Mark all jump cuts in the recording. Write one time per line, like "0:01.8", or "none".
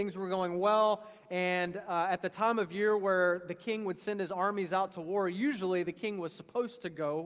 none